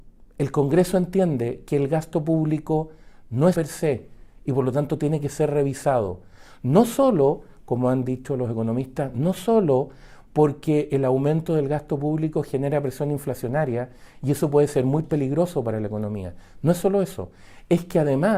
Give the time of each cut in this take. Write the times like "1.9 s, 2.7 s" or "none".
3.5 s